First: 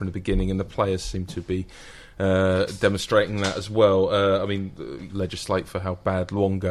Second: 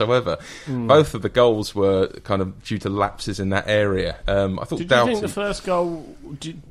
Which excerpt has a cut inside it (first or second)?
first